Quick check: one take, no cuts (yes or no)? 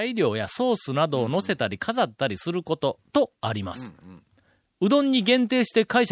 yes